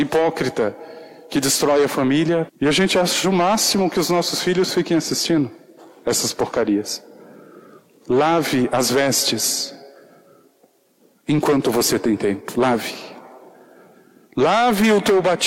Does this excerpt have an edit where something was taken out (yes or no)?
yes